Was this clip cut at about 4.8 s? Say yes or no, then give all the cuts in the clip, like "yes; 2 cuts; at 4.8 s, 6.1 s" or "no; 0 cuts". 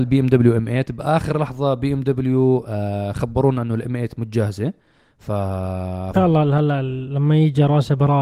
no; 1 cut; at 6.1 s